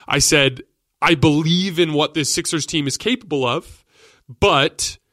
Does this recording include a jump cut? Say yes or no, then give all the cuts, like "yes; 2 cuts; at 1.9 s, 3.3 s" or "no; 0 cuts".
no; 0 cuts